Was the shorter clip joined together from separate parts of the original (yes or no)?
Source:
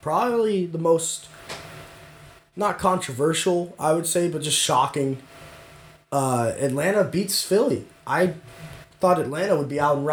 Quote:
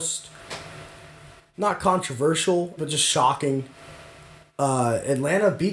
yes